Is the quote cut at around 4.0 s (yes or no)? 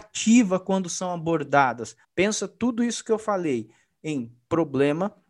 no